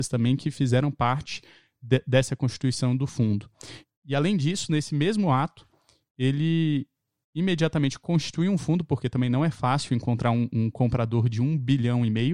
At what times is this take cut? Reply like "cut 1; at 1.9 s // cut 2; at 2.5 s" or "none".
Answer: cut 1; at 3.9 s